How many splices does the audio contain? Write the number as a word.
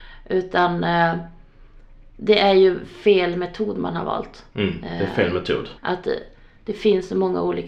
one